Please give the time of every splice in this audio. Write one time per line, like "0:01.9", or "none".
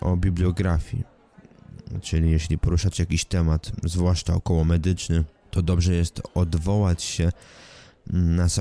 none